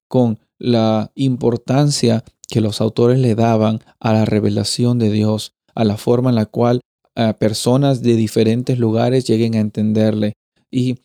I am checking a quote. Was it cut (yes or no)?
no